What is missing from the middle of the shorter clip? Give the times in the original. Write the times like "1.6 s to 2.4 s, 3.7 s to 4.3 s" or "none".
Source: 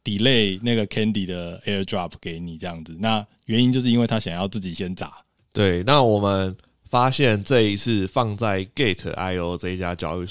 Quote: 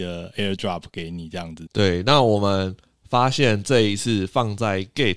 3.0 s to 5.5 s